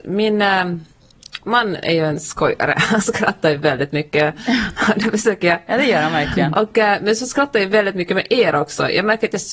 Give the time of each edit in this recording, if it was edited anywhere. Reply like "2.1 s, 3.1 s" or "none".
none